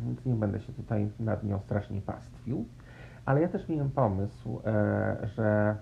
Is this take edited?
no; 0 cuts

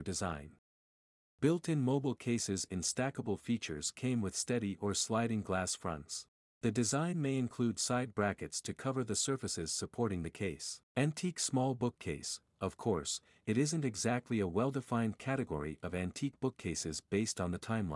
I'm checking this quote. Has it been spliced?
yes; 2 cuts; at 6.5 s, 10.9 s

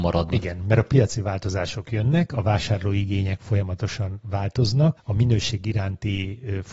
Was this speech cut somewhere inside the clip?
yes; 1 cut; at 5.0 s

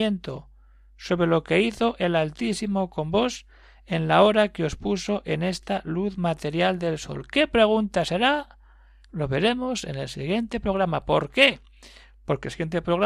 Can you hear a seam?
no; 0 cuts

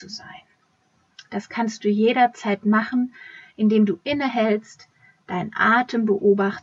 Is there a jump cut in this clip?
no; 0 cuts

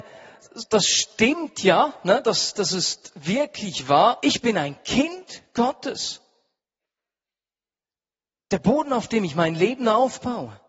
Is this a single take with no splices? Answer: no; 1 cut; at 4.2 s

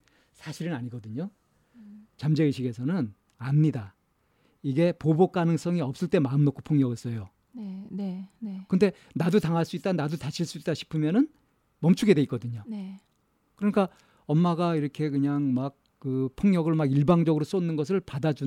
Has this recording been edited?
no; 0 cuts

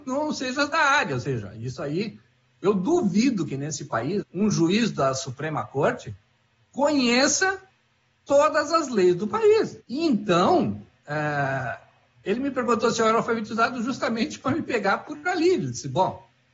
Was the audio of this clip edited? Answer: yes; 2 cuts; at 4.2 s, 9.8 s

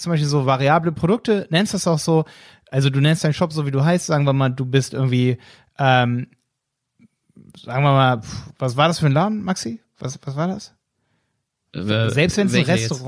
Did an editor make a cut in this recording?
no; 0 cuts

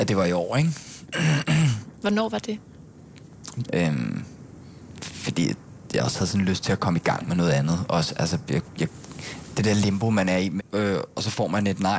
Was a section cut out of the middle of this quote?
yes; 2 cuts; at 3.7 s, 10.6 s

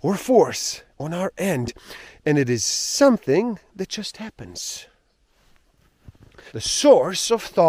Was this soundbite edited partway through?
yes; 1 cut; at 6.5 s

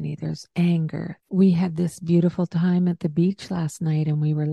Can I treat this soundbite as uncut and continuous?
no; 1 cut; at 1.2 s

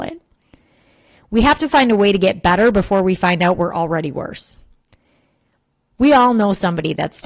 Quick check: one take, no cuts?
yes; 0 cuts

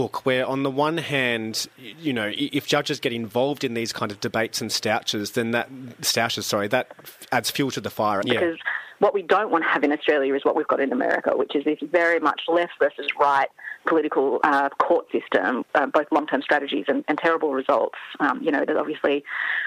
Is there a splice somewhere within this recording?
yes; 3 cuts; at 8.2 s, 14.4 s, 15.6 s

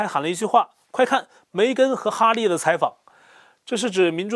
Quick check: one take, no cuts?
yes; 0 cuts

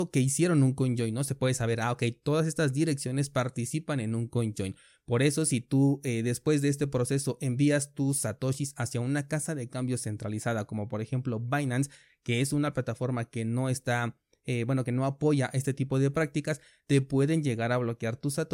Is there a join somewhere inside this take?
no; 0 cuts

